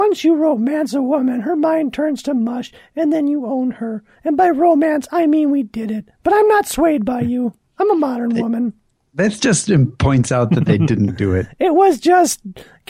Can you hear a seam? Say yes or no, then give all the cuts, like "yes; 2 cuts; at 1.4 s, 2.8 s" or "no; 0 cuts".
no; 0 cuts